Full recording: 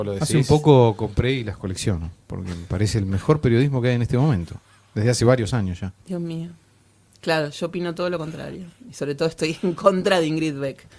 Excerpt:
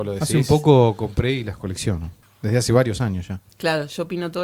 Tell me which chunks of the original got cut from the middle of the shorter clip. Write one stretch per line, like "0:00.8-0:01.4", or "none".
0:02.2-0:04.8
0:06.0-0:07.1